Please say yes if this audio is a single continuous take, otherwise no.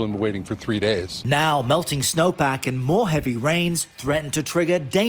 yes